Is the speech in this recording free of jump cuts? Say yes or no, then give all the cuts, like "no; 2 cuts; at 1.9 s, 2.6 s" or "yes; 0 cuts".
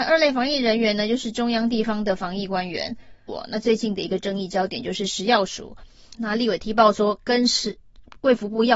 no; 2 cuts; at 3.3 s, 6.1 s